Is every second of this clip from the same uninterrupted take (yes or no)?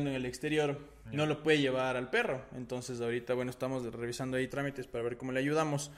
no